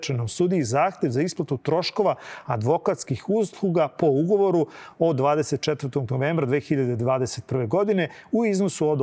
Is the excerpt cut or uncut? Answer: uncut